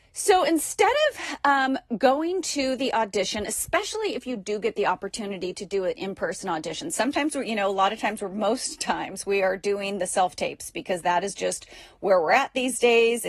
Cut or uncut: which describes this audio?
uncut